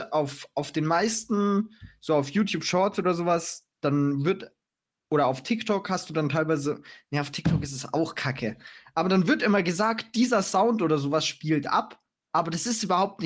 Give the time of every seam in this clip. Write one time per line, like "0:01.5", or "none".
none